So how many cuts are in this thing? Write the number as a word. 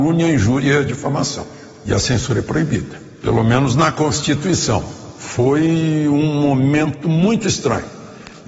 zero